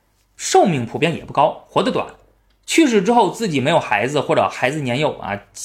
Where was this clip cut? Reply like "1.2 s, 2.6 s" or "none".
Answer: none